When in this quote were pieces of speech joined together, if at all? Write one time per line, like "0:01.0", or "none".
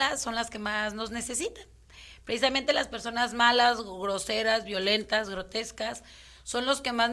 none